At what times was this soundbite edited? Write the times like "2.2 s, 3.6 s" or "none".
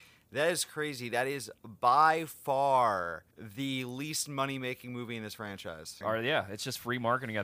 3.3 s, 6.0 s